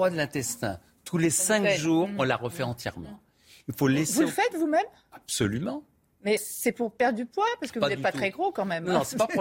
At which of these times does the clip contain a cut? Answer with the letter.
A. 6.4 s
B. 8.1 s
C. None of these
A